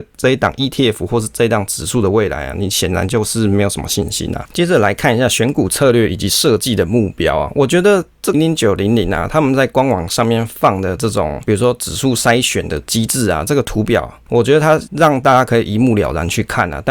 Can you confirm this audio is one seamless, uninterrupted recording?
no; 2 cuts; at 8.3 s, 14.3 s

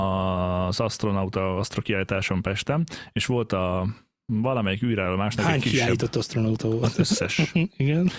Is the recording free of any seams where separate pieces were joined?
yes; 0 cuts

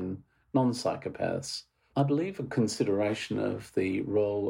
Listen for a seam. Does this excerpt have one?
yes; 1 cut; at 1.9 s

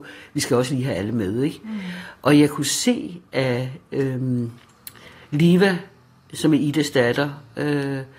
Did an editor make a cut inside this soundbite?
no; 0 cuts

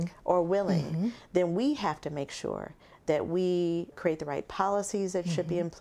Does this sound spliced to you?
yes; 1 cut; at 3.9 s

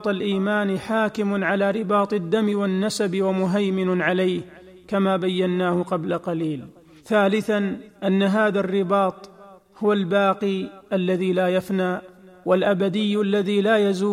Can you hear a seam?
yes; 1 cut; at 7.9 s

